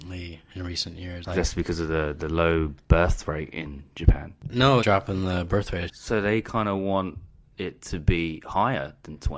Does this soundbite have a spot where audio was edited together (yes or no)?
yes